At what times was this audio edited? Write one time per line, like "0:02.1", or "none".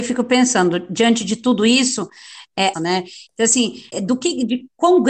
0:02.7
0:03.9

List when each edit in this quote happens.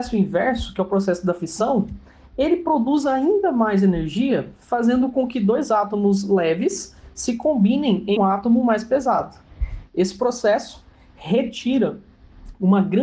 0:08.2
0:09.9

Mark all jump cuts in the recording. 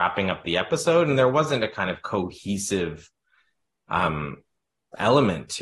none

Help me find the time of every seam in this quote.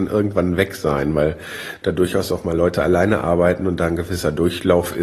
none

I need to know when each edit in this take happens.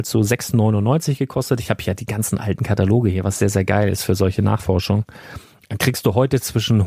none

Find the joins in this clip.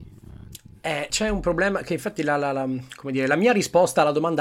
0:01.1

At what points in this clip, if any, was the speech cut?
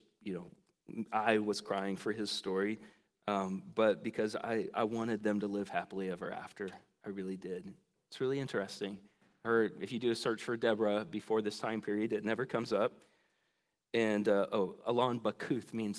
0:08.0

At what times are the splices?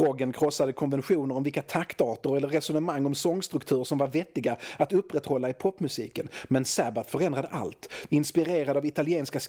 0:08.1

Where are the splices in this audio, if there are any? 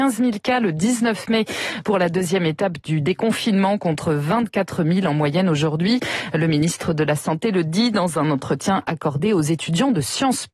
none

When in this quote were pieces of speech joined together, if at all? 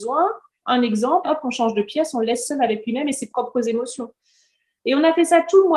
0:01.2

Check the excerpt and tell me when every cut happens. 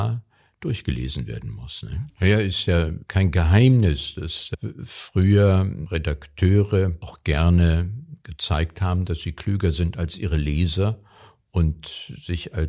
0:02.1

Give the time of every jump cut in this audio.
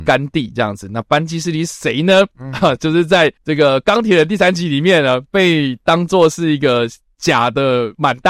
none

